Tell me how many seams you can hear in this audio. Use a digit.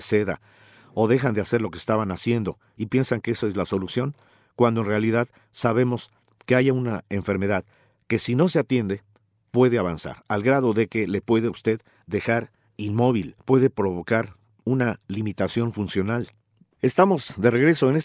2